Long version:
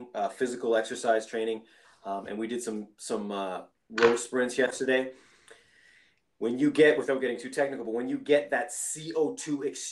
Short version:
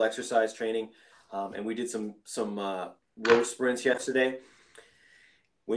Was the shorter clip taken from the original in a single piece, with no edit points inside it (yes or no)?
yes